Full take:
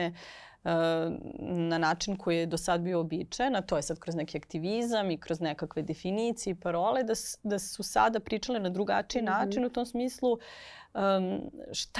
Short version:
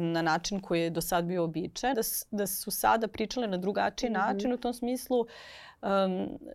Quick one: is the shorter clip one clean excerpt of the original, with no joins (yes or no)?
no